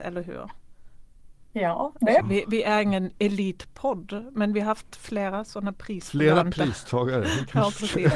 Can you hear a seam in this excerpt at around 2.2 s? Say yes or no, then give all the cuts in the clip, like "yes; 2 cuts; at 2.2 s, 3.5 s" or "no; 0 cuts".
yes; 1 cut; at 2.2 s